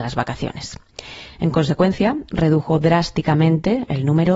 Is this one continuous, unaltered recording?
yes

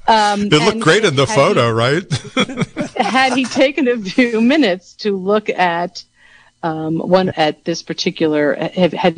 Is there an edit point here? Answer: yes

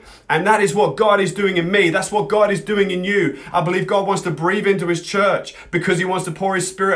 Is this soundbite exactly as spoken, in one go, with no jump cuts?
no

